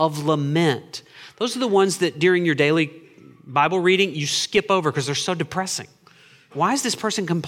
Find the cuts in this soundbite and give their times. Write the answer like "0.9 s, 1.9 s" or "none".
6.5 s